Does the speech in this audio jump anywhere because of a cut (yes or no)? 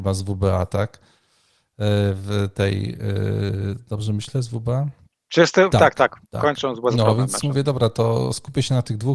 no